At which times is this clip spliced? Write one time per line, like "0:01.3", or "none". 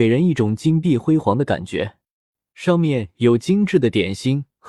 0:02.4